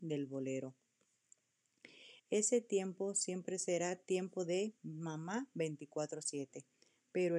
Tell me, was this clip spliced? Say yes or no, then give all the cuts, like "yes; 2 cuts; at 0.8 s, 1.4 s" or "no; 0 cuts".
yes; 1 cut; at 2.2 s